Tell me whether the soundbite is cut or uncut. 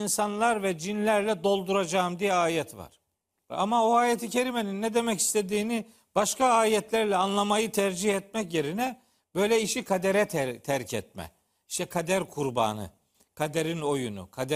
cut